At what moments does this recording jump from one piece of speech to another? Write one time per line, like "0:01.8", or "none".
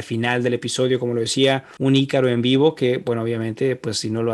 0:01.8